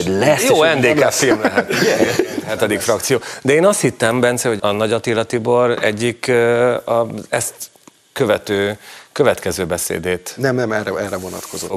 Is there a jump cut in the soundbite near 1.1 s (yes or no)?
no